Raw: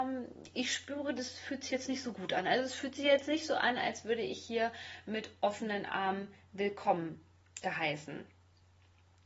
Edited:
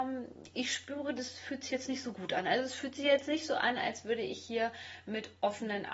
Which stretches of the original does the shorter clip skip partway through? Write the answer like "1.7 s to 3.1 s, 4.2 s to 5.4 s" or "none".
none